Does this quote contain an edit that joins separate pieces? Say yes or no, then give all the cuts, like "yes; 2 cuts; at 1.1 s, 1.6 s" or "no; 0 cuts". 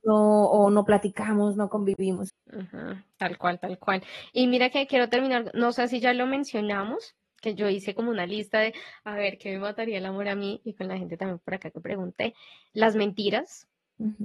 yes; 1 cut; at 2.3 s